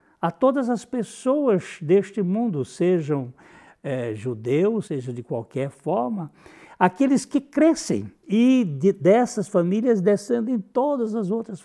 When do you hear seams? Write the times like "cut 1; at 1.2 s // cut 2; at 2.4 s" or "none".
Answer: cut 1; at 4.9 s // cut 2; at 8.2 s